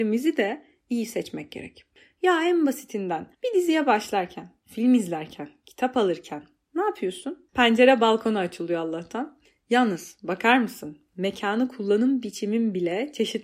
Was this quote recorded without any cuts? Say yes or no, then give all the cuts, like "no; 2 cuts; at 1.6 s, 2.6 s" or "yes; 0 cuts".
no; 2 cuts; at 3.3 s, 7.5 s